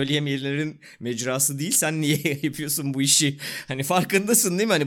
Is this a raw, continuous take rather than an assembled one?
yes; 0 cuts

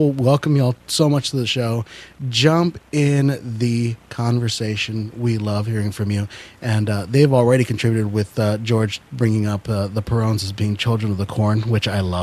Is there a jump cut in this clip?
no; 0 cuts

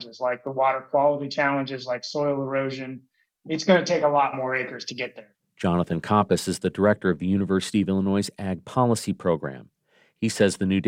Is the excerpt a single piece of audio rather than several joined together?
yes; 0 cuts

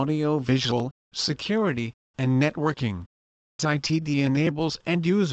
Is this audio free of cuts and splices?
no; 1 cut; at 3.6 s

